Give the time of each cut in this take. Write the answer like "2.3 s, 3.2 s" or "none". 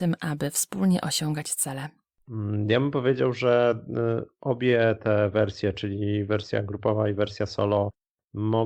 none